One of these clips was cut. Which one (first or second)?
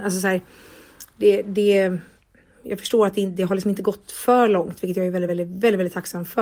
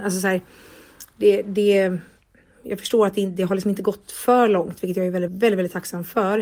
second